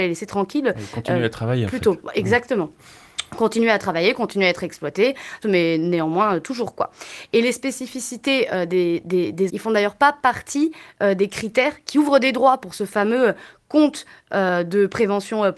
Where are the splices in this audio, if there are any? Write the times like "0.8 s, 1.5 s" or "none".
5.4 s, 9.5 s